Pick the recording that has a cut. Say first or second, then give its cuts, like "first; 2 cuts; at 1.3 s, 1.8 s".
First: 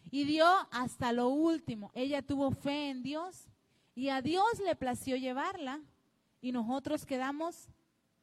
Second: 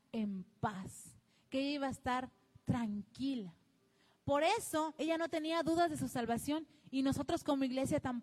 first; 1 cut; at 1.9 s